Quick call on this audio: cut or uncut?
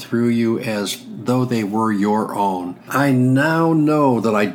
cut